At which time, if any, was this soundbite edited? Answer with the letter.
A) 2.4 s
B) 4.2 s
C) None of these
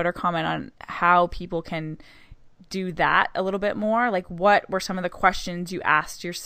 C